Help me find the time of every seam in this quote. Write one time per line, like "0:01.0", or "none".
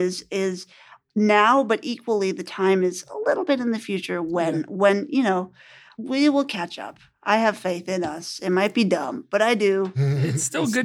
none